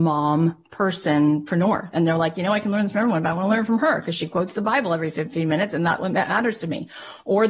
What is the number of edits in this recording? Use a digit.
1